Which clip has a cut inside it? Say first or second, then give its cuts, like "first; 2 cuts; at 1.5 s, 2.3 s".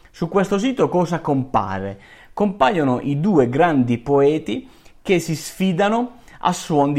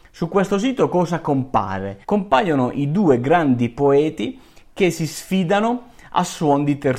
second; 1 cut; at 2.0 s